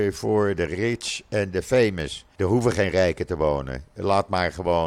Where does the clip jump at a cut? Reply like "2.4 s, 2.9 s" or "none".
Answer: 2.3 s